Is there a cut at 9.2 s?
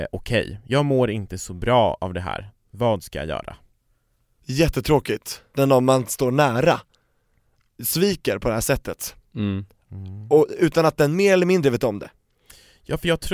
no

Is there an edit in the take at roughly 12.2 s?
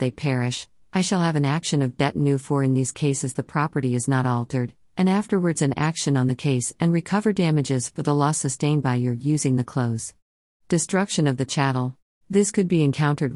yes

